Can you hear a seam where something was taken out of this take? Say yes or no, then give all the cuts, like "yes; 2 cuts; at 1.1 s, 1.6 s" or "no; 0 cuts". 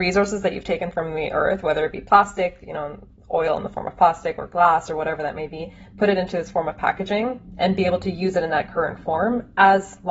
no; 0 cuts